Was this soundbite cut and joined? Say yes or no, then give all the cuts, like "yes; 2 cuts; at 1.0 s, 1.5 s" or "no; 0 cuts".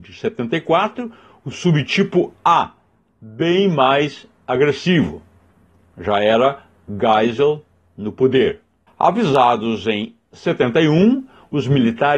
no; 0 cuts